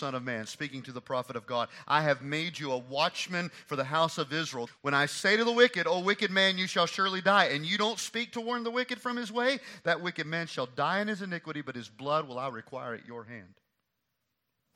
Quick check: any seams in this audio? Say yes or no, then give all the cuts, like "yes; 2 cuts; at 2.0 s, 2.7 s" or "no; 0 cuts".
yes; 1 cut; at 4.7 s